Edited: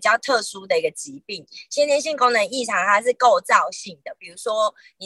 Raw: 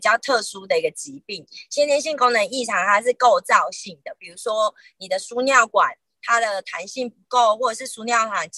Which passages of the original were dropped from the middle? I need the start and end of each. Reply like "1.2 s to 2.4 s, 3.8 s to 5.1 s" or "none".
none